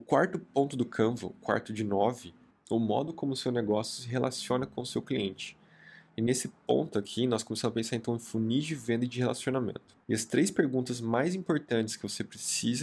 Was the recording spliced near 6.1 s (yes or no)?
no